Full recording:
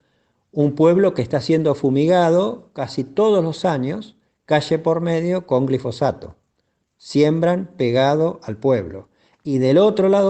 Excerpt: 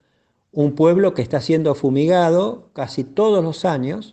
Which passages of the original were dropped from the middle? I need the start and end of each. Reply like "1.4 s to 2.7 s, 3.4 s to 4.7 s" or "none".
none